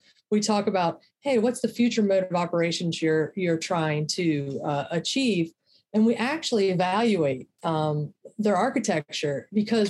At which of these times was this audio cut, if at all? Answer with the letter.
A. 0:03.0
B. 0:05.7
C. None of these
C